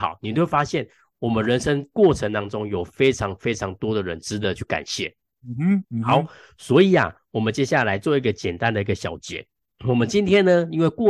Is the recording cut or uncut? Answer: cut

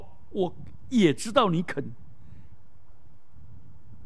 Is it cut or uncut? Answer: cut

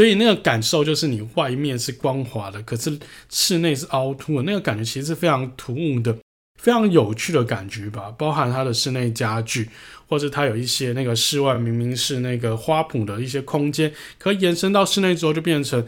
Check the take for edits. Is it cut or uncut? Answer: uncut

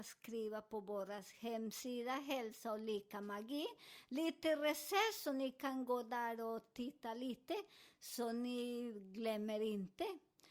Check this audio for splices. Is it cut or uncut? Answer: uncut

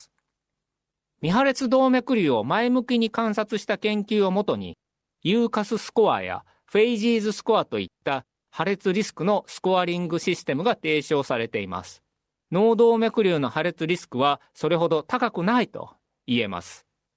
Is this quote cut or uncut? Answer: cut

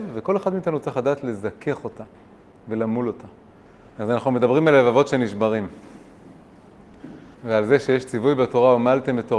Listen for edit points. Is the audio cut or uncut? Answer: cut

